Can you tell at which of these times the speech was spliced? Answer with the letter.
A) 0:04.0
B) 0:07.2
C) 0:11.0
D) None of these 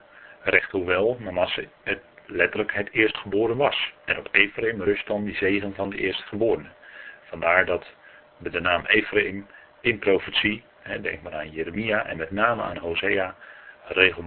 A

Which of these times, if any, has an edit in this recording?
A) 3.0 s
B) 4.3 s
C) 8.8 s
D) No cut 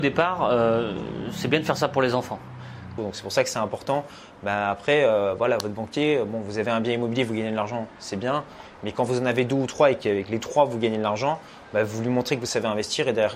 A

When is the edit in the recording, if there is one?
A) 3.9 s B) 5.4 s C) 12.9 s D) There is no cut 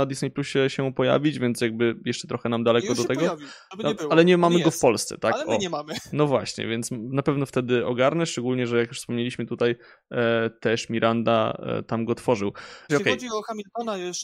C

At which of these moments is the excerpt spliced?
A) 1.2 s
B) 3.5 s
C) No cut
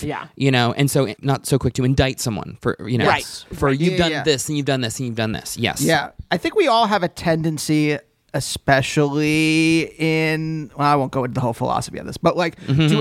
A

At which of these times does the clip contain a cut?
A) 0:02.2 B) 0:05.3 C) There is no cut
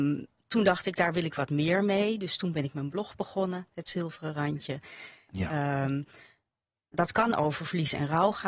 B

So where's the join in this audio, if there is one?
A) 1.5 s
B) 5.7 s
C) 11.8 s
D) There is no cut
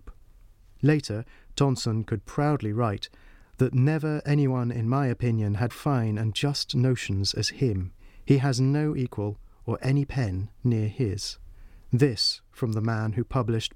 B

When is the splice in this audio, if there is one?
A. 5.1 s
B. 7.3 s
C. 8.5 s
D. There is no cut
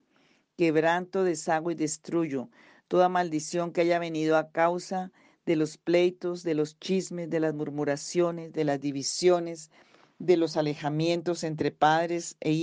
C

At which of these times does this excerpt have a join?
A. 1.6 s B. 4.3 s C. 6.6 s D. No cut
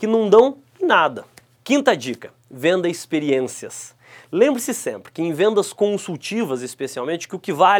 A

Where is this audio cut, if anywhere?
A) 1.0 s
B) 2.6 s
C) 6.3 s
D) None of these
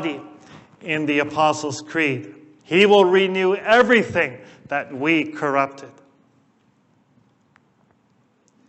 B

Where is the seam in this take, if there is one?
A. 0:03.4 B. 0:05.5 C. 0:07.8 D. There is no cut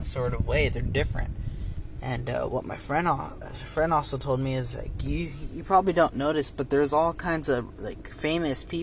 A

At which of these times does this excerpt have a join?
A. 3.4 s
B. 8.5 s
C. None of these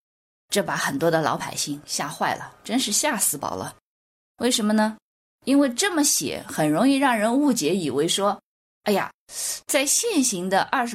A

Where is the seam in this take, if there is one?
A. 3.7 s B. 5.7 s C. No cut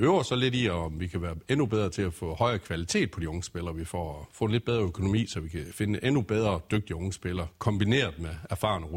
B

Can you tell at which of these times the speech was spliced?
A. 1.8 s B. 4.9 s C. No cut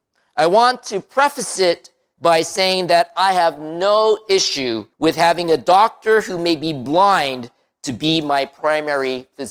B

